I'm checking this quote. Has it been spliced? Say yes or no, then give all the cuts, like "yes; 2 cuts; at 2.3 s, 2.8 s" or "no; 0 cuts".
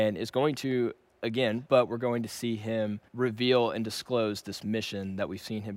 yes; 2 cuts; at 1.7 s, 3.1 s